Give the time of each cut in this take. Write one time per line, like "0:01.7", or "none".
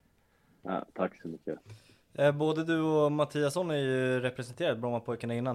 none